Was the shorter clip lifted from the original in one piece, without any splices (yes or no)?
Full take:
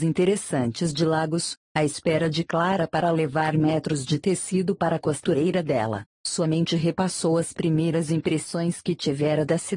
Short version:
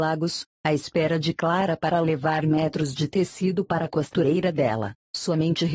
yes